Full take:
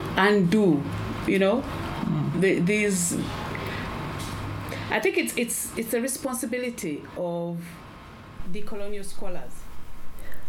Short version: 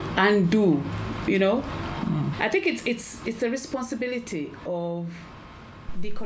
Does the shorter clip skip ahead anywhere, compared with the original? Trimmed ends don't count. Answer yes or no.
yes